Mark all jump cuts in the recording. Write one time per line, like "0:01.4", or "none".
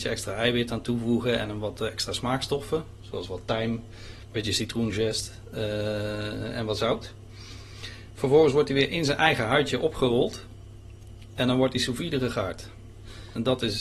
none